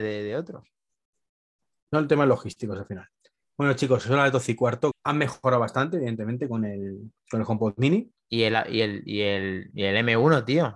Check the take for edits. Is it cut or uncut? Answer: cut